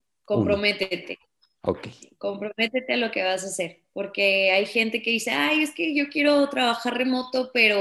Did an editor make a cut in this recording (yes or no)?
no